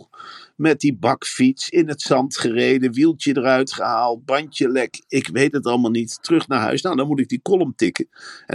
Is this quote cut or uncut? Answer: uncut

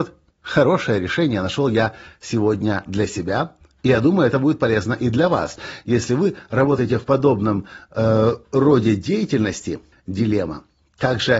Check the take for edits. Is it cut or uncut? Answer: cut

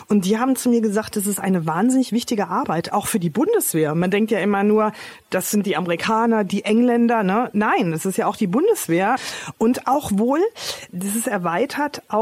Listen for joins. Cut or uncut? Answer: uncut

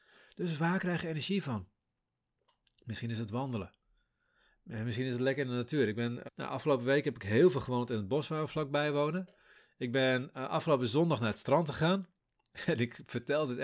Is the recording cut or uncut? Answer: cut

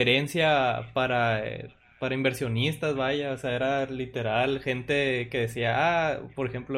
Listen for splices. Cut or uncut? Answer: uncut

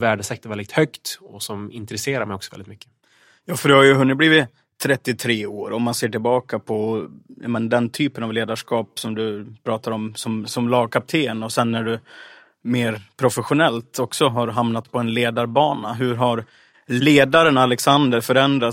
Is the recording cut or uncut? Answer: uncut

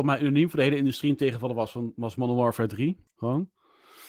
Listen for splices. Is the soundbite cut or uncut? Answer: cut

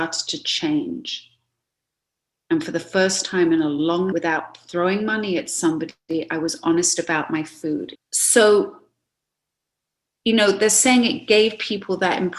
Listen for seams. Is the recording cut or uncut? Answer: cut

